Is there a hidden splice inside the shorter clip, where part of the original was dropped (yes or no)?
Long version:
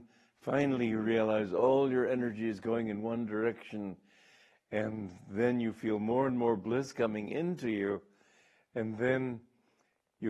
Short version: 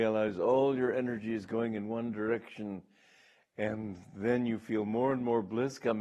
no